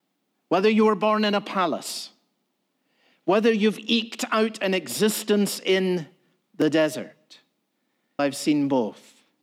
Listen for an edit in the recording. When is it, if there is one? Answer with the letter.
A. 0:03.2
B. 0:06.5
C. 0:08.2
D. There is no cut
C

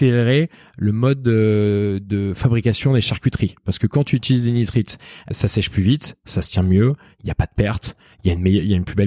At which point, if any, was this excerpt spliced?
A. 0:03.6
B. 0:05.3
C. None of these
B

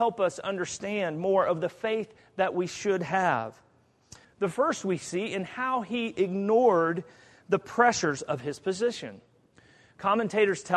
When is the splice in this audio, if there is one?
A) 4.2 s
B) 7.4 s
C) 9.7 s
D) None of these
A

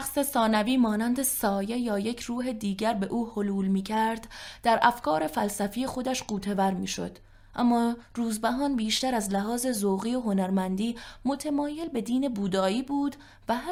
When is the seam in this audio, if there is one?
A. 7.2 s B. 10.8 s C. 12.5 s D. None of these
D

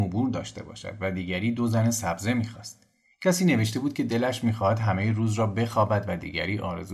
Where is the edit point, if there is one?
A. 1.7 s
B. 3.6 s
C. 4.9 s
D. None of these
D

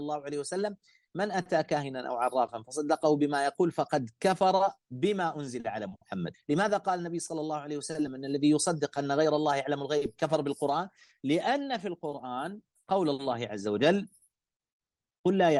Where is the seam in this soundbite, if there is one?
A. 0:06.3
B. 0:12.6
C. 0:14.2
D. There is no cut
A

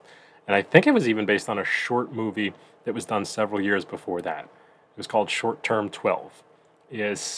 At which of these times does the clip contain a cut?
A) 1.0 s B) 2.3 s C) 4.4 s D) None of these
D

